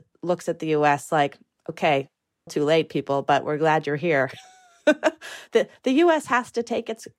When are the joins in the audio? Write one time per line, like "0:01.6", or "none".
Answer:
0:02.5

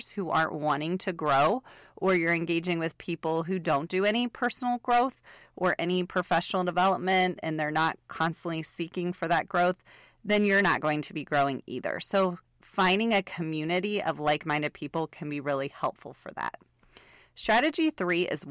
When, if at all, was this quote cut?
none

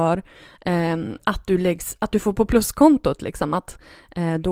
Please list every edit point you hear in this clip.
none

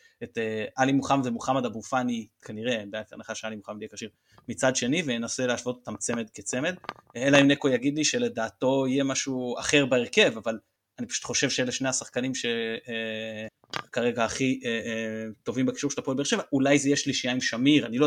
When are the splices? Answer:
none

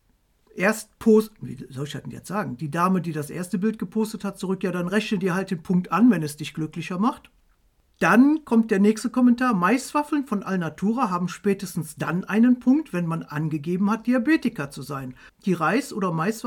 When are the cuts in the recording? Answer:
0:15.3

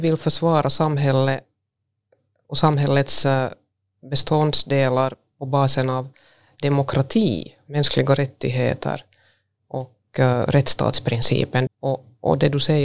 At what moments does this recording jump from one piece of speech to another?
0:11.7

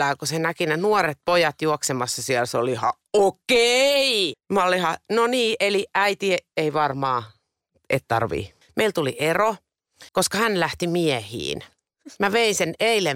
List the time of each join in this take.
0:04.3
0:08.6
0:10.1

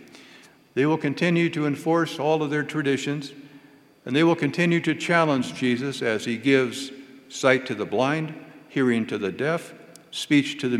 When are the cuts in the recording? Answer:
none

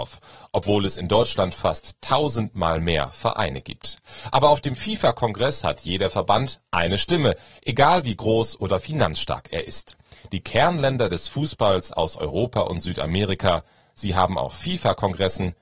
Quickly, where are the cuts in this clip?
none

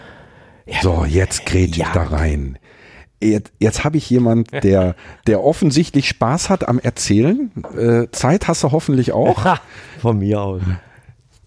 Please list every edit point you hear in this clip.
none

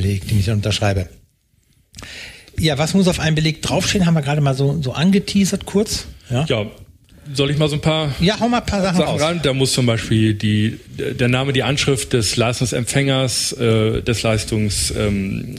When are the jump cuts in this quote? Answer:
none

